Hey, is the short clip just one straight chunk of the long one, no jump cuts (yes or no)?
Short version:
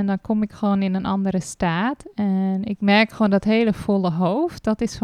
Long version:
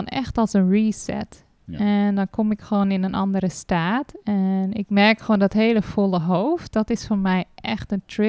yes